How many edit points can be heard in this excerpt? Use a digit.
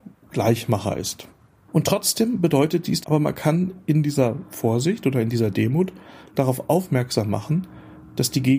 2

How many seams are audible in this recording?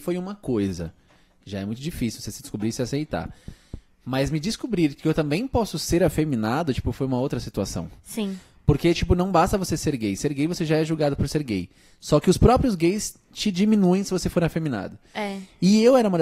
0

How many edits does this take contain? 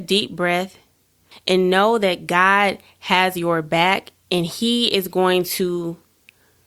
1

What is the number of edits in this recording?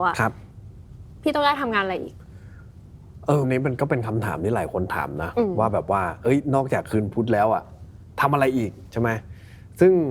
1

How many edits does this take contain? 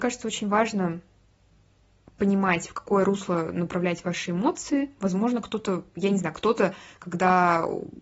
0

